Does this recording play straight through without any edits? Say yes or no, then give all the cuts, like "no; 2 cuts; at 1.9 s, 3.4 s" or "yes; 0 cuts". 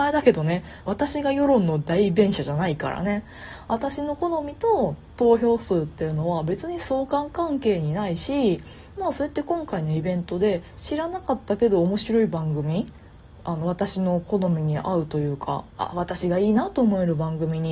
no; 1 cut; at 15.7 s